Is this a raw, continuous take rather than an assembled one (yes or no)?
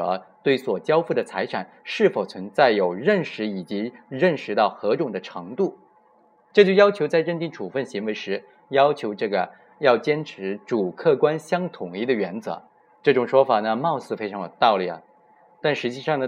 no